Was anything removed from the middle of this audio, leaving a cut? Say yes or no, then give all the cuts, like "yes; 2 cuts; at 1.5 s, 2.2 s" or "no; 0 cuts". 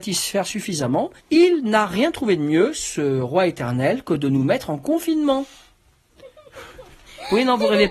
yes; 1 cut; at 1.2 s